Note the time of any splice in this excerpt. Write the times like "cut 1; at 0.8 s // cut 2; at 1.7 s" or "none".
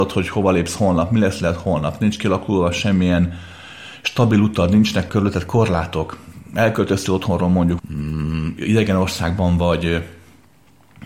cut 1; at 7.8 s